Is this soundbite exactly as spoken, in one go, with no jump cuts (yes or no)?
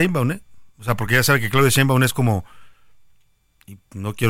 yes